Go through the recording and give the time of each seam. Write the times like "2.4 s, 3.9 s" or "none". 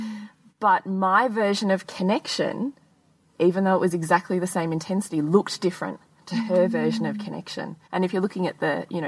7.8 s